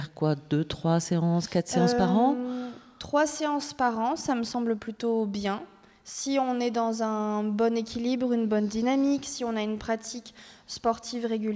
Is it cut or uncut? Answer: uncut